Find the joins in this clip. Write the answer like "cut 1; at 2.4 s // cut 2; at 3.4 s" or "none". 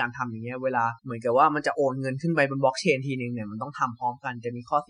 cut 1; at 1.0 s